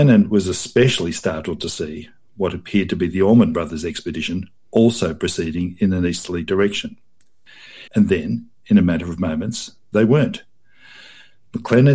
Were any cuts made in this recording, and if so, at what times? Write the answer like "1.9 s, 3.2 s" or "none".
7.9 s